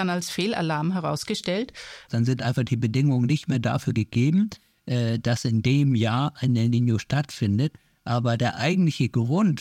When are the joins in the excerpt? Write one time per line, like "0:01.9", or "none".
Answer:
0:02.1